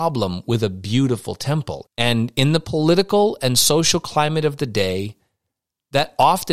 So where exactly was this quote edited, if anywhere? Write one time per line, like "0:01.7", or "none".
0:01.9